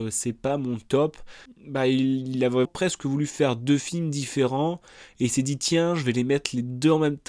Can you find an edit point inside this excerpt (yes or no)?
yes